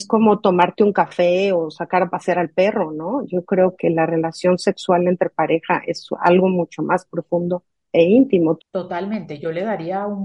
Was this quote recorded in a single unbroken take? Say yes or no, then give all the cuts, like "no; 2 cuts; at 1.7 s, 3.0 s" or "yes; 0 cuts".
no; 2 cuts; at 3.8 s, 8.6 s